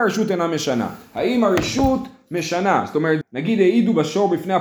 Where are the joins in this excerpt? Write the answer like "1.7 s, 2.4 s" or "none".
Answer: 3.2 s